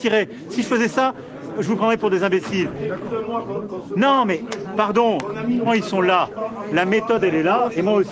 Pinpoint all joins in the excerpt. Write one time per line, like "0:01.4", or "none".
0:05.7

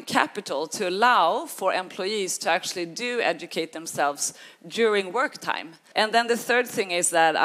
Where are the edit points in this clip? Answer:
0:05.9

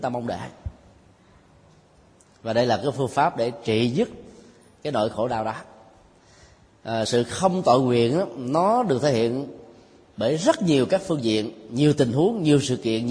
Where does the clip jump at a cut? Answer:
none

